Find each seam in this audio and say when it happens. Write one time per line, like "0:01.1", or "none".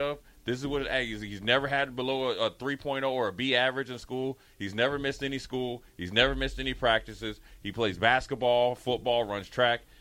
none